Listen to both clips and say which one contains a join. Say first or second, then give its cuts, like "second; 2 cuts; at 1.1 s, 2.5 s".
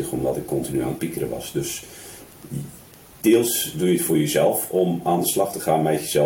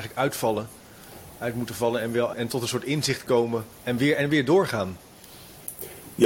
second; 2 cuts; at 2.3 s, 3.7 s